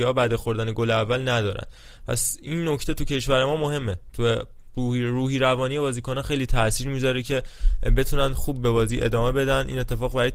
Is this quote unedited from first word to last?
yes; 0 cuts

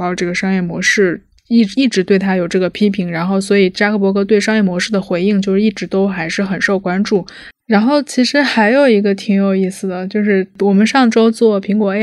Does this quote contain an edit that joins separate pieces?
no; 0 cuts

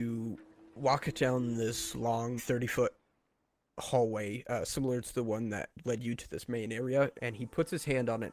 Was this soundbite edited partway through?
yes; 2 cuts; at 2.4 s, 7.1 s

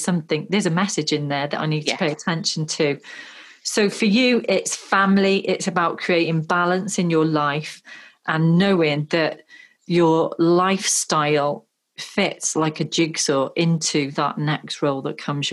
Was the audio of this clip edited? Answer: no; 0 cuts

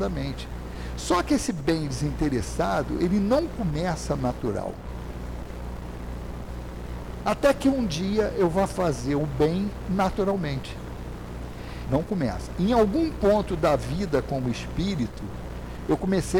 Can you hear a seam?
yes; 2 cuts; at 7.2 s, 11.8 s

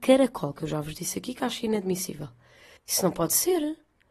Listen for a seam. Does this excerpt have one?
yes; 1 cut; at 2.8 s

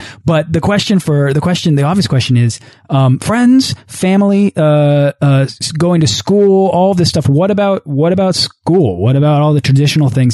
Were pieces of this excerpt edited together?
no; 0 cuts

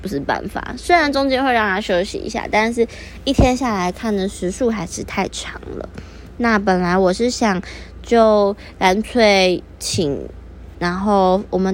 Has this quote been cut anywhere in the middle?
yes; 1 cut; at 10.7 s

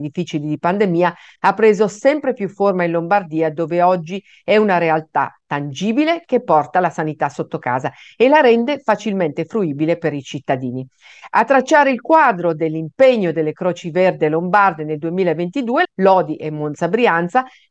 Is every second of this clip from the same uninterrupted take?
no; 1 cut; at 15.8 s

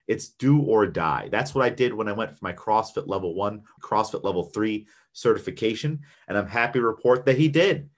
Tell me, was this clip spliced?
yes; 2 cuts; at 3.8 s, 6.1 s

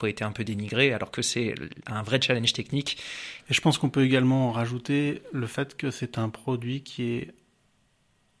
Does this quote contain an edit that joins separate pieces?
yes; 1 cut; at 3.4 s

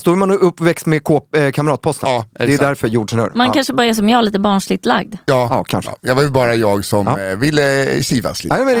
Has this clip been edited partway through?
no; 0 cuts

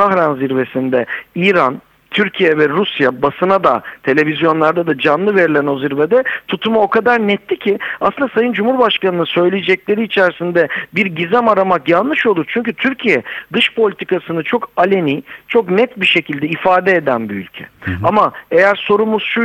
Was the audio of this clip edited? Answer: no; 0 cuts

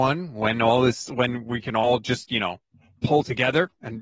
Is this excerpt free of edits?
yes; 0 cuts

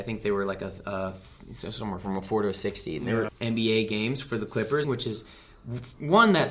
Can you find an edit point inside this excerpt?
yes; 2 cuts; at 3.3 s, 4.8 s

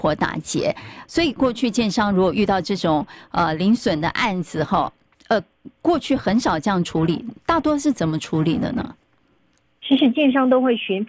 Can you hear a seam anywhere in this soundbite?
yes; 1 cut; at 1.0 s

